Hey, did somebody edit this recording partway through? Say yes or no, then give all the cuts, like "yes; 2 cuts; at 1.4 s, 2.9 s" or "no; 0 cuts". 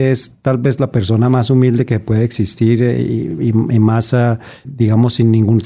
yes; 1 cut; at 4.6 s